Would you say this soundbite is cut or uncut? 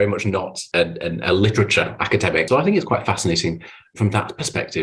cut